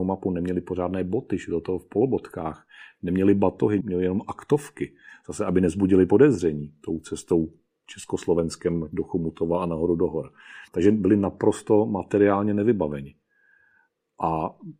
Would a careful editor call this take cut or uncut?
cut